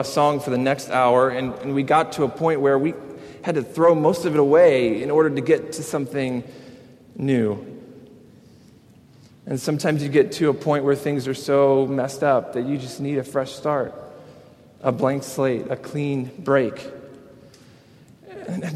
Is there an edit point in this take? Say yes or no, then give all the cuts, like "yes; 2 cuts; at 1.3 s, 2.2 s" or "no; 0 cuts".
no; 0 cuts